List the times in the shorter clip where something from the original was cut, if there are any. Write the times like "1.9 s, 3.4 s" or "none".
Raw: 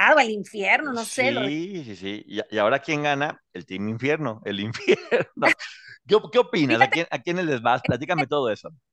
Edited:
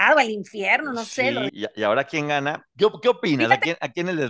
1.5 s, 2.7 s